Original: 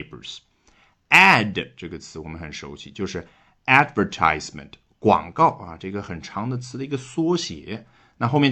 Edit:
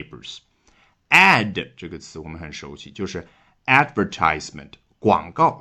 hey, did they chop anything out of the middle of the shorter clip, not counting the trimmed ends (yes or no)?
no